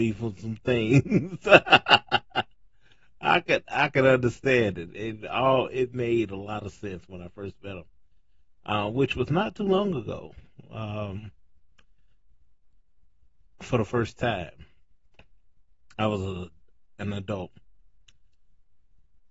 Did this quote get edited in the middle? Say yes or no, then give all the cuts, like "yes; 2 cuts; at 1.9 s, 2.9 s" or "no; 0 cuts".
no; 0 cuts